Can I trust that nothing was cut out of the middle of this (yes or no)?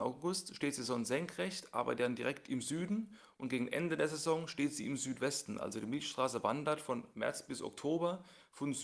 yes